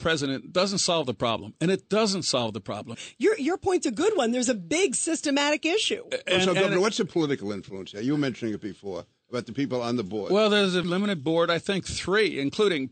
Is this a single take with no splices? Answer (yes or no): no